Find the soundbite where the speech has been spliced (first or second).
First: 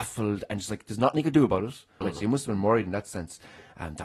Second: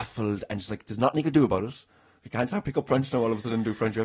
first